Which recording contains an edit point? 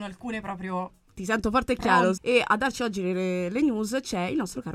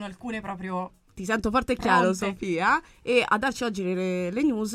first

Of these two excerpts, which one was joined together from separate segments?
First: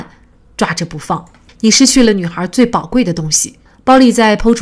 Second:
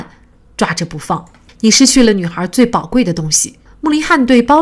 first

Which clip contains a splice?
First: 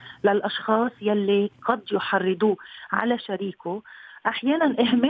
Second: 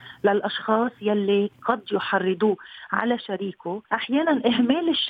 second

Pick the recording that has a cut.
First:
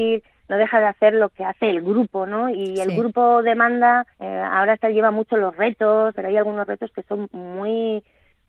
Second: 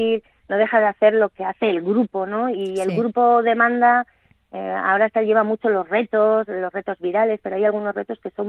first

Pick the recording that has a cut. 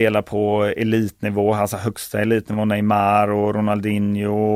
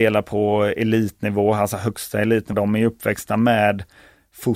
second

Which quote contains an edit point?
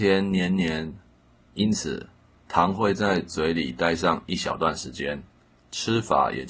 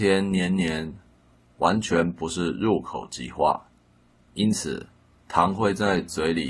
first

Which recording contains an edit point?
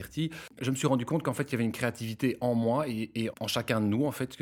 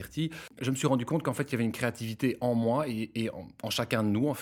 first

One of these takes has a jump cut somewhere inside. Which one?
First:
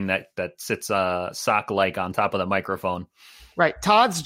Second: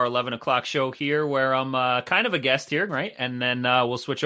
second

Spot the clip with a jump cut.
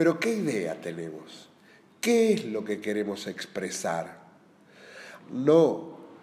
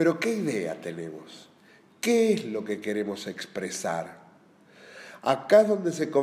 first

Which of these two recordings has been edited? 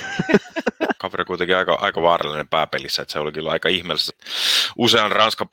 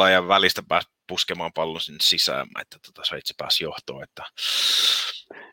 first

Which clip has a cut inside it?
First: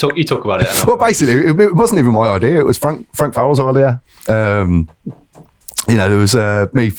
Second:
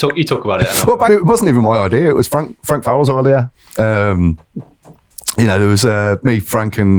second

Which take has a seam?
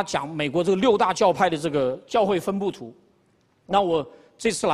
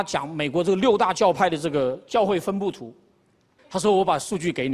second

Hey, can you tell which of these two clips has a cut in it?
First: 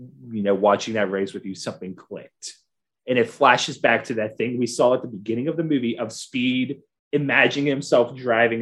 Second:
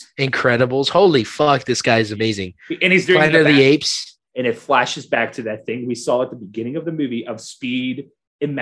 second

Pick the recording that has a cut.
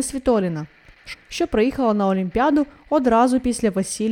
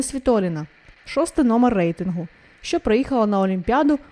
first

